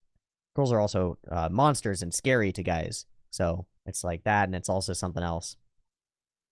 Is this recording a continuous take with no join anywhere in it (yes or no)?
no